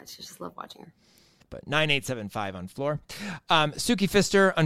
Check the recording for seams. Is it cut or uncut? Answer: cut